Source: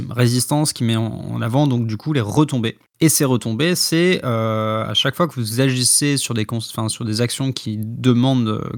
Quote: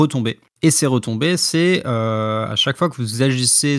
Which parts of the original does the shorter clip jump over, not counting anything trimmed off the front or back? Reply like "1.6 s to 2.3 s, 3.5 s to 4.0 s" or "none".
none